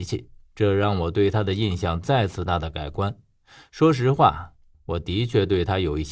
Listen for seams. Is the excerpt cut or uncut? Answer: cut